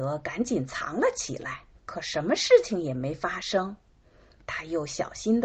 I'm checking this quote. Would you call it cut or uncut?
cut